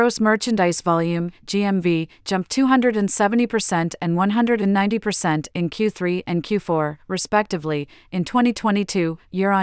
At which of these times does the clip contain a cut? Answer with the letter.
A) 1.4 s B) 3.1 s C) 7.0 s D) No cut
D